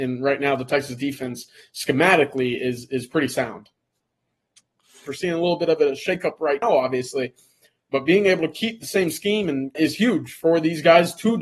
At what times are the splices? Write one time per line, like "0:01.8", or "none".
0:05.1
0:06.6
0:09.7

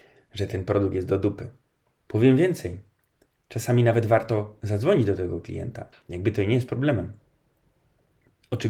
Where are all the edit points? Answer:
0:02.0
0:05.9

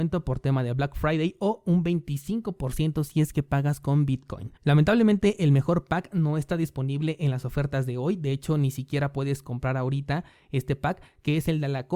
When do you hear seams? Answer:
0:04.6

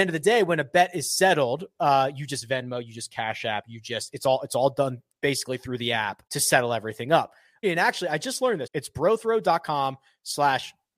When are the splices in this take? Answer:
0:06.3
0:07.6
0:08.7

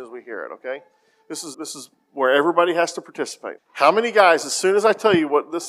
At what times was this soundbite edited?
0:01.5
0:03.6

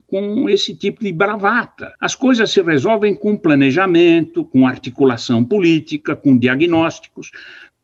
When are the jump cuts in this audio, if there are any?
0:02.0

